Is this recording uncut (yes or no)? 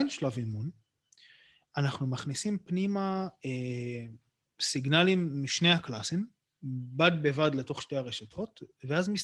yes